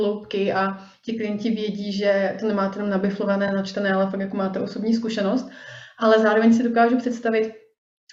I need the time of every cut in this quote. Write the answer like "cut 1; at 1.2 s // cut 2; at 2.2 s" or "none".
none